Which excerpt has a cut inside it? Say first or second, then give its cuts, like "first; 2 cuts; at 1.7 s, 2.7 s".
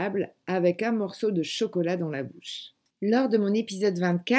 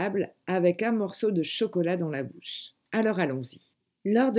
first; 1 cut; at 2.9 s